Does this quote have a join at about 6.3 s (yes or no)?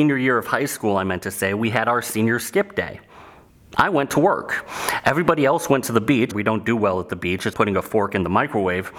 yes